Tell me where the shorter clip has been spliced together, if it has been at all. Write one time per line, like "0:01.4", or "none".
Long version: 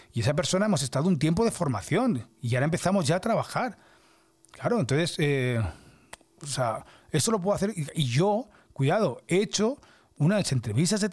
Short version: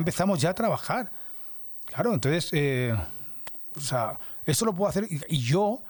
none